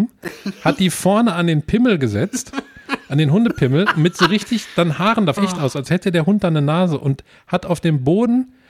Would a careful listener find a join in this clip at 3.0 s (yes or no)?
no